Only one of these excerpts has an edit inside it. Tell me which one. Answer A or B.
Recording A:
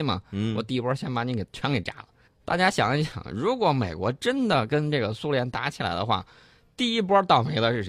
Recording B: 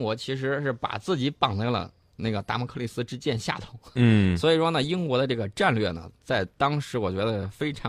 A